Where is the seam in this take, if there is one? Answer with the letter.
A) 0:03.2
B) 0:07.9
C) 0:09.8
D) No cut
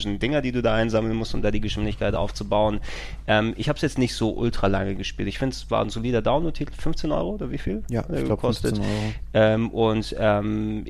D